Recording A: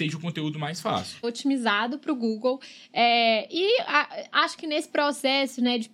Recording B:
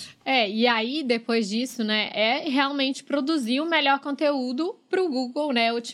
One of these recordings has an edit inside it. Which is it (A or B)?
A